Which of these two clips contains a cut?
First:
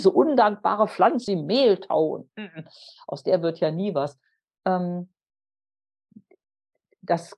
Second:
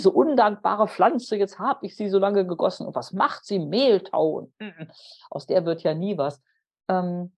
first; 1 cut; at 1.3 s

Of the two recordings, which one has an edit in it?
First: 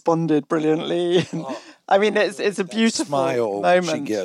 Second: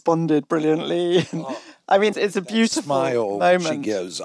second; 1 cut; at 2.1 s

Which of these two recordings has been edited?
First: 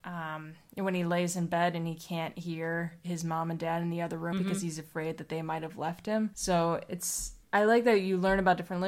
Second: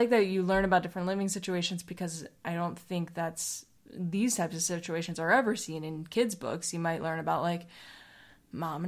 first; 3 cuts; at 4.3 s, 6.3 s, 7.4 s

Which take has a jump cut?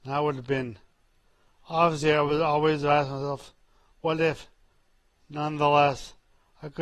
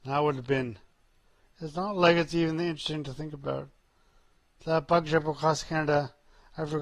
second; 1 cut; at 1.4 s

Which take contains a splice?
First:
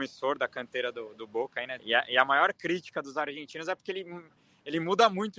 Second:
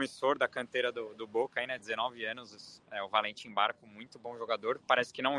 first; 1 cut; at 1.8 s

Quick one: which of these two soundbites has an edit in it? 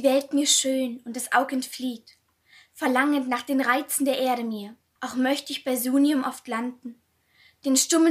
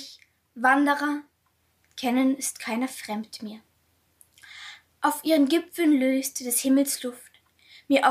first; 1 cut; at 5.0 s

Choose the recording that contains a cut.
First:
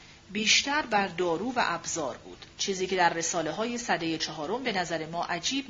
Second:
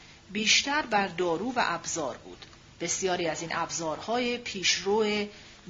first; 1 cut; at 2.5 s

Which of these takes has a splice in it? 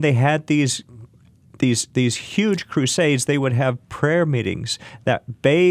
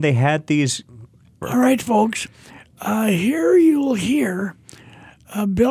second; 1 cut; at 1.4 s

